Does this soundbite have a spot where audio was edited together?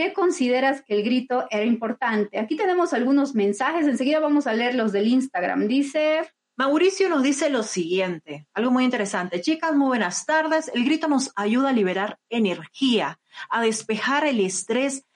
no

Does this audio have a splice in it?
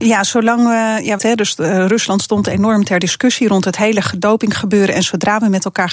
yes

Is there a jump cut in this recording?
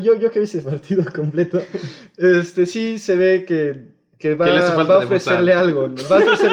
no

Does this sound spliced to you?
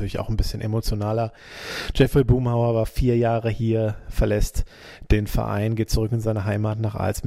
no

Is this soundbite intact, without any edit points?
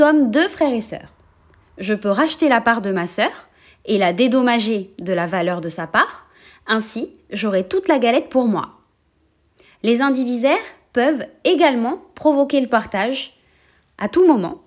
yes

